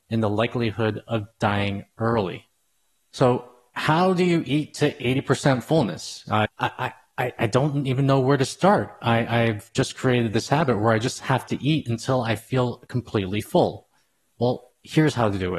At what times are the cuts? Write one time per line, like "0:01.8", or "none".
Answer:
0:06.5

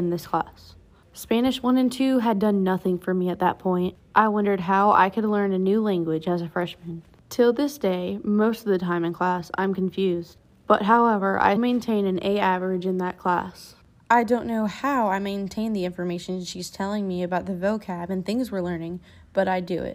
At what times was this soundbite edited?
0:11.6

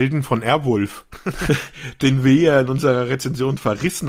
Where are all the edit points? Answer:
0:01.5

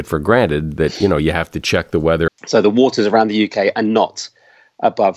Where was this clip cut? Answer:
0:02.3

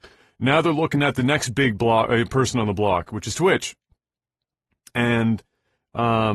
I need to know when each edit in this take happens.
none

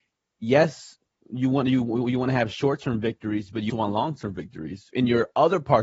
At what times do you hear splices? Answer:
0:03.7

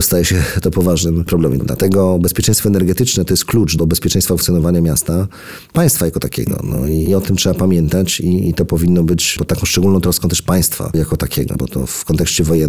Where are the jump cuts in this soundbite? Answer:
0:01.6
0:11.6

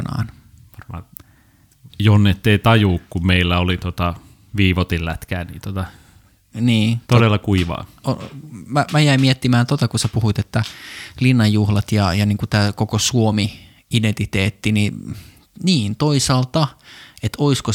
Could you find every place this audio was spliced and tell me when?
0:01.9
0:07.0

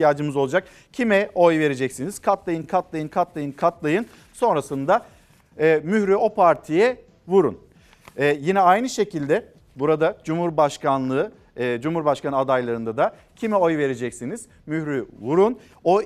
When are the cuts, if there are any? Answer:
none

